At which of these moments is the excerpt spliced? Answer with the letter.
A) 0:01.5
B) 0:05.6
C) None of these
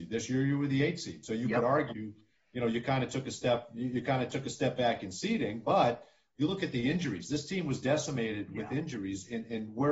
C